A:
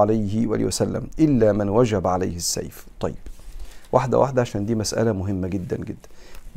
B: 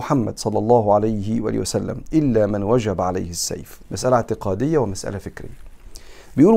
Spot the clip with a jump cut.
B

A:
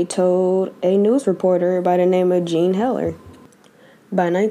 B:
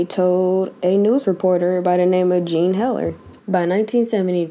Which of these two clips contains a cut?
B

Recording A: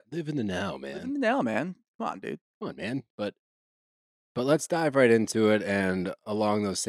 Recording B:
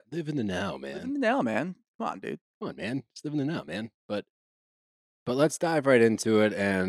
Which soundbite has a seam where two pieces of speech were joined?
A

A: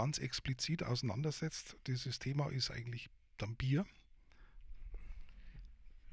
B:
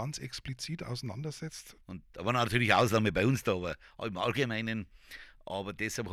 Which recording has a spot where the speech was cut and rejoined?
B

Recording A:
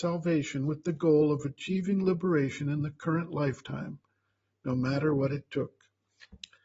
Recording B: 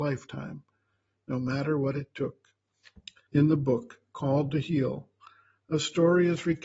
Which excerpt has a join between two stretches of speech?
B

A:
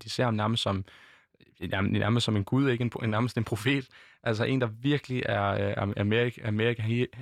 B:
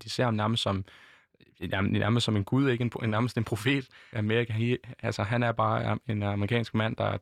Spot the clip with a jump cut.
B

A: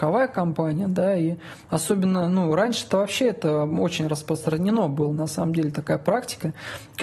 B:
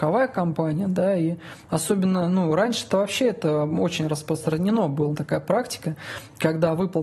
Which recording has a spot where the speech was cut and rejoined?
B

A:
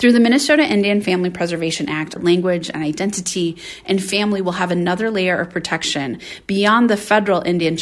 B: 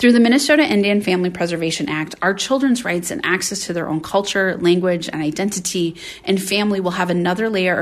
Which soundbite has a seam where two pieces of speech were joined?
A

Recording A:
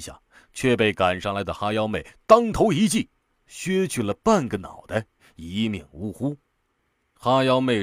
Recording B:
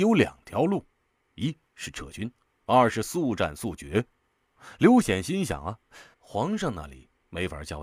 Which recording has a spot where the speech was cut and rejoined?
B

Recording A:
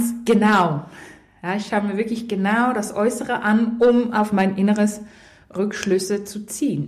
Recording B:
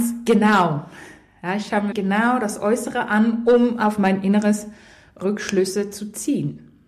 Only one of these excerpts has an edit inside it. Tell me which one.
B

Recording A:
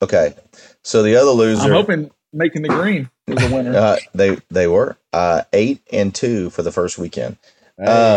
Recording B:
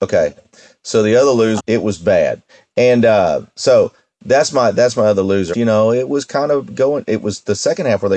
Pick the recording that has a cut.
B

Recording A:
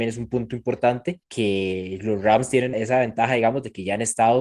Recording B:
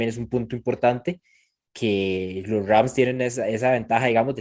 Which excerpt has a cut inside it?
A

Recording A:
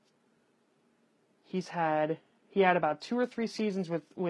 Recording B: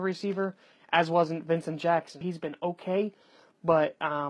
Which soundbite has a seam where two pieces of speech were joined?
B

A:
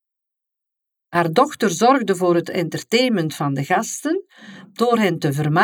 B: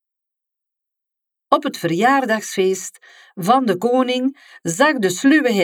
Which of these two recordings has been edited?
A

